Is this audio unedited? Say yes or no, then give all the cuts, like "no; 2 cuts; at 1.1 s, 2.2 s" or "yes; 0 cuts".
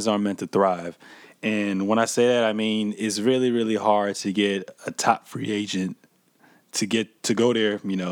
yes; 0 cuts